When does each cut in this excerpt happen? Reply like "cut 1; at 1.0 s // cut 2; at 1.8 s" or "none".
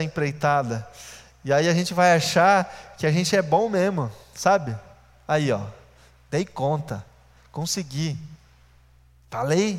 none